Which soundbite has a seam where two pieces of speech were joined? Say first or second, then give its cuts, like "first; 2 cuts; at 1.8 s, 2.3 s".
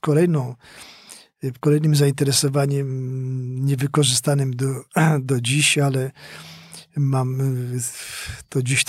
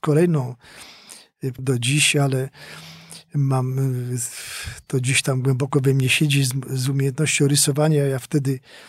second; 1 cut; at 1.6 s